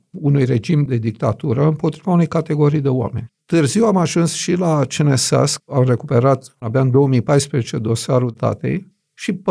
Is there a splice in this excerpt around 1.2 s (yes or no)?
no